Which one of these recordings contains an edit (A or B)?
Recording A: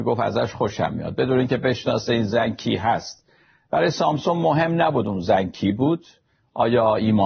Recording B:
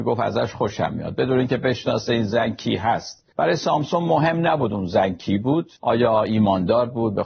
B